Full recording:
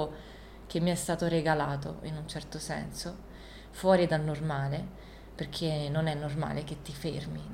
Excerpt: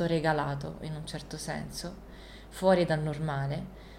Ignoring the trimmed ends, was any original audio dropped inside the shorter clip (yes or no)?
no